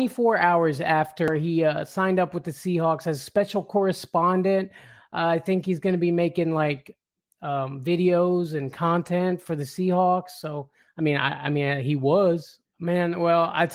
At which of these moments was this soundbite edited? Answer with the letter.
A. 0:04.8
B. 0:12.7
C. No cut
B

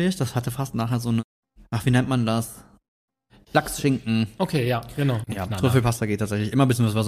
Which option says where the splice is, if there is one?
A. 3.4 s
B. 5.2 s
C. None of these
B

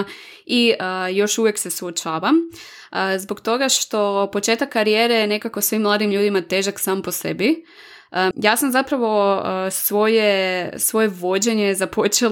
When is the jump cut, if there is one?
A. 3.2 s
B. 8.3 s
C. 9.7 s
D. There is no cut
B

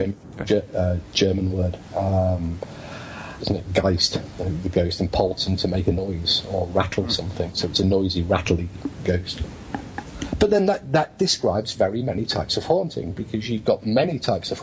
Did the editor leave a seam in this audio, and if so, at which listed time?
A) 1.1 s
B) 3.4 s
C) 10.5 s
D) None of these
B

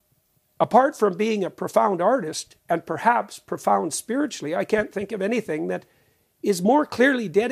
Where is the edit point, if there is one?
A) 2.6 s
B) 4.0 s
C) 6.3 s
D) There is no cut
A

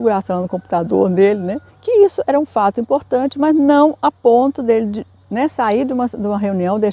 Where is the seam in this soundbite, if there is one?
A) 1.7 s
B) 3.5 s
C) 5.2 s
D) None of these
A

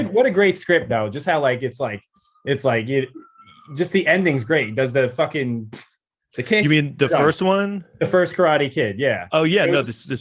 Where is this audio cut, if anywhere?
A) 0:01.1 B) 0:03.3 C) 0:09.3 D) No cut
D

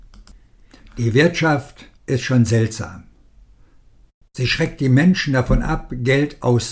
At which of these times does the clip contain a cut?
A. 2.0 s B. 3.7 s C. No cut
A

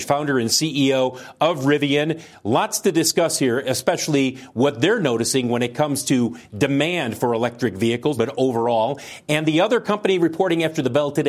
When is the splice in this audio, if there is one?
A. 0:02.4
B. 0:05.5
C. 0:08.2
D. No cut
C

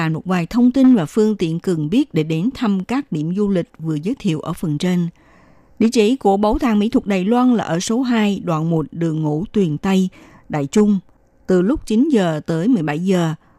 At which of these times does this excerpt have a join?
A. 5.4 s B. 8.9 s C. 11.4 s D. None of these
C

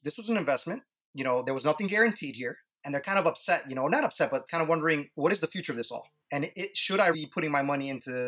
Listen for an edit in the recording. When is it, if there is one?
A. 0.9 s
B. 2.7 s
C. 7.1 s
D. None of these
C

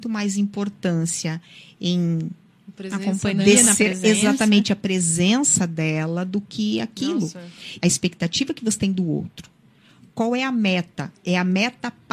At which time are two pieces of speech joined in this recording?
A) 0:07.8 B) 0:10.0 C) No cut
A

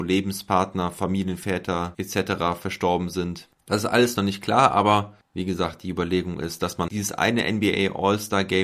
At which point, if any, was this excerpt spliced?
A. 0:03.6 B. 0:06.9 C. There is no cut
B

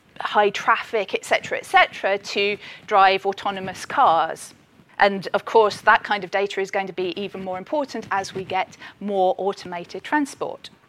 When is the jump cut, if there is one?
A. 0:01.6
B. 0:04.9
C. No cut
B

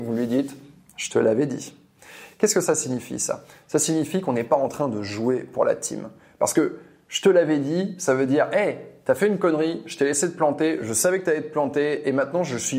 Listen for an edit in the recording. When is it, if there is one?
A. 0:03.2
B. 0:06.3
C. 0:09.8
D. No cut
D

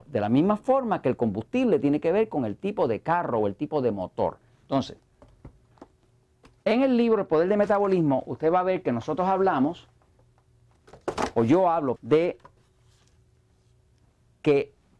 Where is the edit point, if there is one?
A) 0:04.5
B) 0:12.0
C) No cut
B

